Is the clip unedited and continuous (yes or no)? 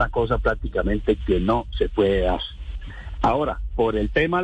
yes